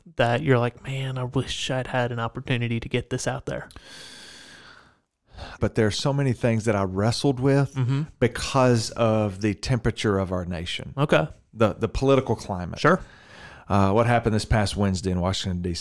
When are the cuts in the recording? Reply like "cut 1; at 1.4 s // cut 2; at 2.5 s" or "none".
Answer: cut 1; at 5.6 s